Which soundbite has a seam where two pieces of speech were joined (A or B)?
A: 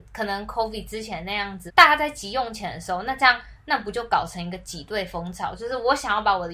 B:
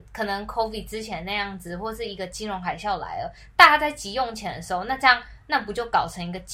A